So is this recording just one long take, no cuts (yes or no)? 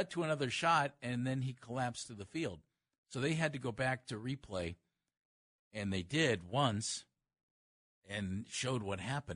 yes